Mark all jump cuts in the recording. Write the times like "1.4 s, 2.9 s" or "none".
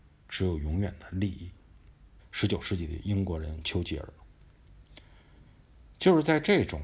2.2 s